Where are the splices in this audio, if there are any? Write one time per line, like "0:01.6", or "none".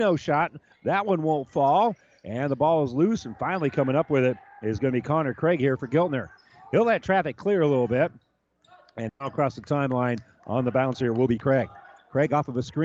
0:09.1

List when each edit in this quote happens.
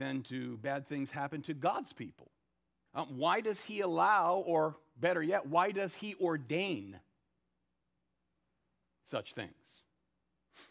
0:02.9

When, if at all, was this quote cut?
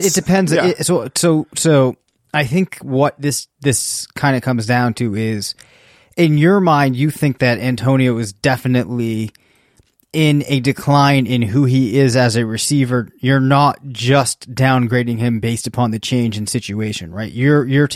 none

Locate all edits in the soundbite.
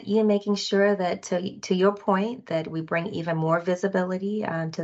none

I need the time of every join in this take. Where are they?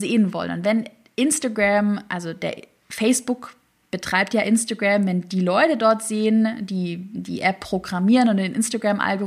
none

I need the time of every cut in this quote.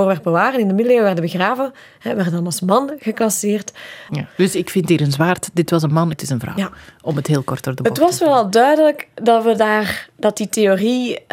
0:04.1
0:06.1

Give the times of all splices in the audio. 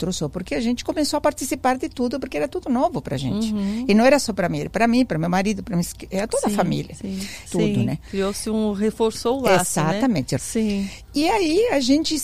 0:07.5
0:10.4

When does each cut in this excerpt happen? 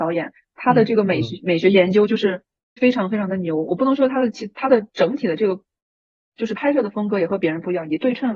0:02.8

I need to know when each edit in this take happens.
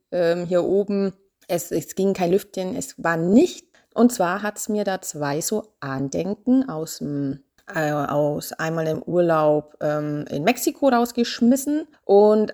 0:03.8

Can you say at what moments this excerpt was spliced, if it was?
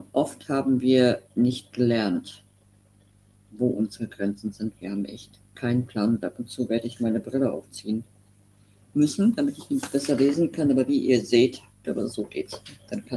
0:11.8

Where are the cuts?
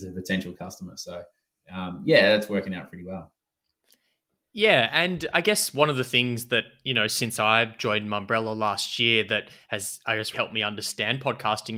0:05.3
0:10.3

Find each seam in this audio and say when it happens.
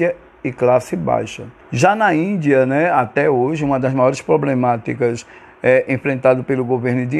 0:01.6

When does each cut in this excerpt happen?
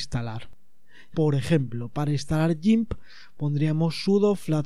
0:01.1

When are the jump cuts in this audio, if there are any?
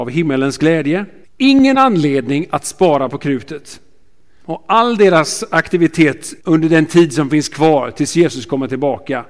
0:01.2
0:04.4
0:06.4

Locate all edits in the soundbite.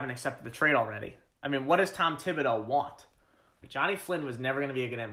0:03.6

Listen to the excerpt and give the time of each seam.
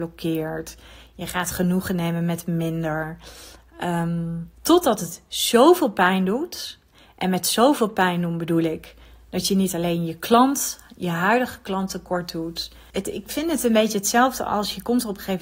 0:04.5
0:12.9

